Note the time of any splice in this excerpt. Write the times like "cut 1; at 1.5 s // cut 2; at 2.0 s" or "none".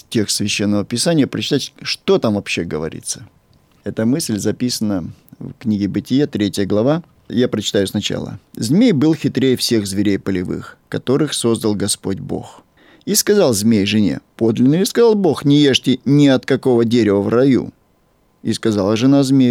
none

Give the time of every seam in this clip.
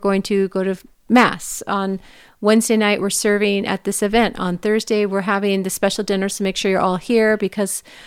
none

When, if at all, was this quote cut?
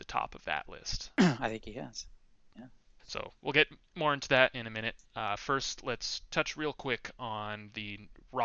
cut 1; at 3.0 s

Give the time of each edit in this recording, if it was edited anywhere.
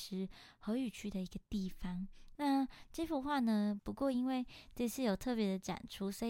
cut 1; at 2.3 s // cut 2; at 3.8 s

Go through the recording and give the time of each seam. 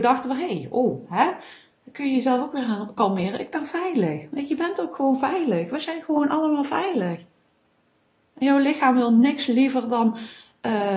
none

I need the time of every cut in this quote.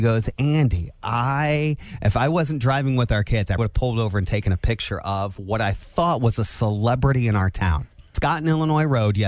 cut 1; at 3.6 s

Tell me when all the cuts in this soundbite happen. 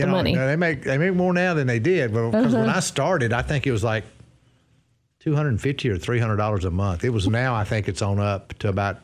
cut 1; at 7.3 s

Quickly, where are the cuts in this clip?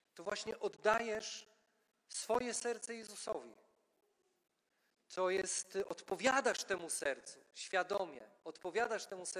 none

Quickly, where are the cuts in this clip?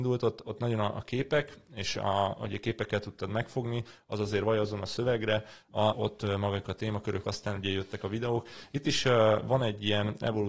cut 1; at 5.9 s // cut 2; at 7.2 s

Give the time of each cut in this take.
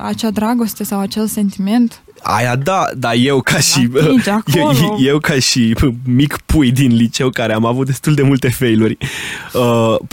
none

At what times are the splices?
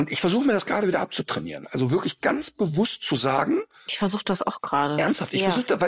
none

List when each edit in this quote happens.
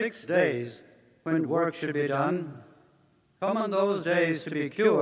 none

